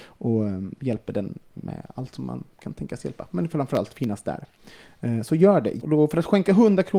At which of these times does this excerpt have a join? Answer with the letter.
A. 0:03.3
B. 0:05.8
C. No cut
B